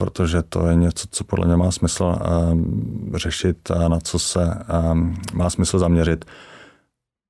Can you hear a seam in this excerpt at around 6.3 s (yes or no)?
no